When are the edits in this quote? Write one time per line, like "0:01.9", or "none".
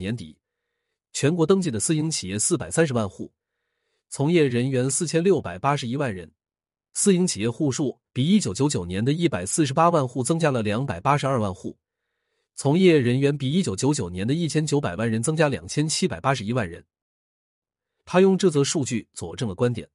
none

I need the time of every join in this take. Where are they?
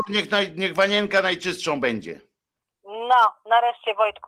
none

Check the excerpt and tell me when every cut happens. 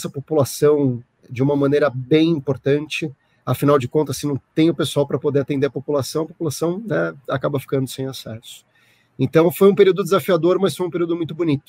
none

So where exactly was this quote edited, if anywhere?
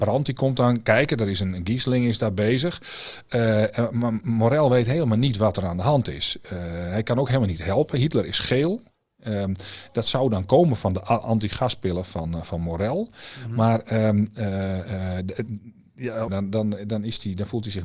0:16.3

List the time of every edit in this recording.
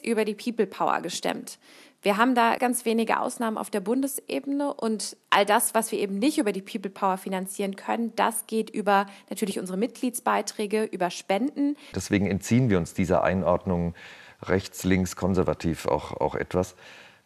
0:02.6
0:11.9

